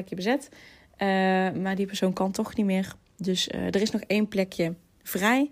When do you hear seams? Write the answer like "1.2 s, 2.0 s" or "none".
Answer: none